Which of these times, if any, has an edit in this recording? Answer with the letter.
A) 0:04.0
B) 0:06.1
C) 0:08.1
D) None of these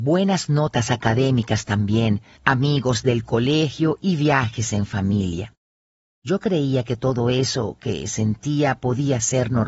B